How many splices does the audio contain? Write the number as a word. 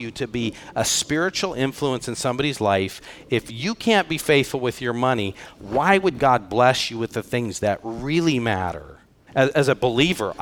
one